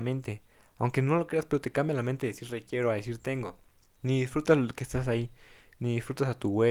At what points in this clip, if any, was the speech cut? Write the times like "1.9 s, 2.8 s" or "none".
3.9 s

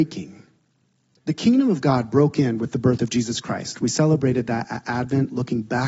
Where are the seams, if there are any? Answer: 1.2 s

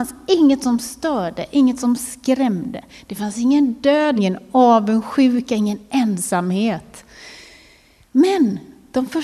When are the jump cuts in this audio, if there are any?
4.2 s

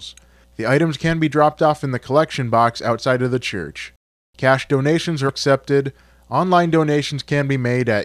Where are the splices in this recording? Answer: 5.3 s

